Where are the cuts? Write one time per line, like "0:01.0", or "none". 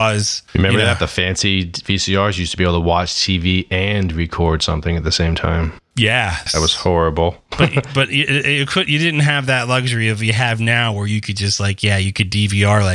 0:06.5